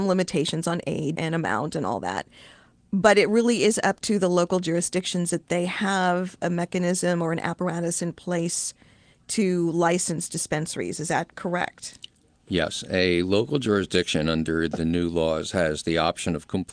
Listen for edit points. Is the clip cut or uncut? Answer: cut